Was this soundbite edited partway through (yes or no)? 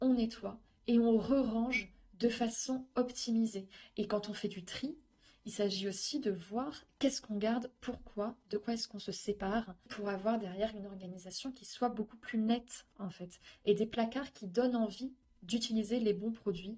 no